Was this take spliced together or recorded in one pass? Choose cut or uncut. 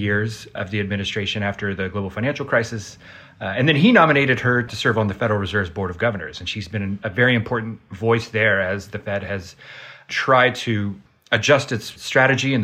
uncut